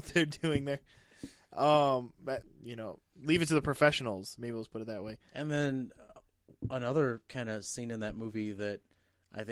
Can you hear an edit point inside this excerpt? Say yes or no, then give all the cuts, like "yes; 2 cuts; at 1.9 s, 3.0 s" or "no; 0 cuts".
yes; 1 cut; at 2.4 s